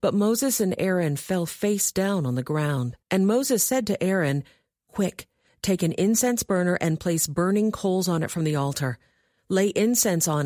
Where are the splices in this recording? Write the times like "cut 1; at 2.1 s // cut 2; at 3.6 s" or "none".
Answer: cut 1; at 3.0 s